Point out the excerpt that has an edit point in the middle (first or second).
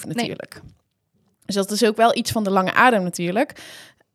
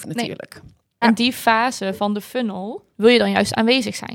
second